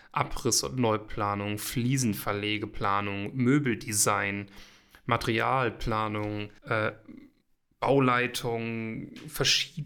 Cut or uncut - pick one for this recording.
cut